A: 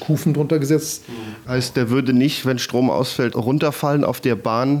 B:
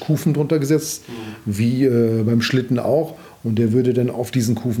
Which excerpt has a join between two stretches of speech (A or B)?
A